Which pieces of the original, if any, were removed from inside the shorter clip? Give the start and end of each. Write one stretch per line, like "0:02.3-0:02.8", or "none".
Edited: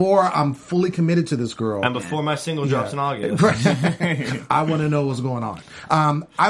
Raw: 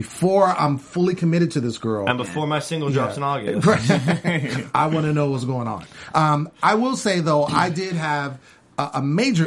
none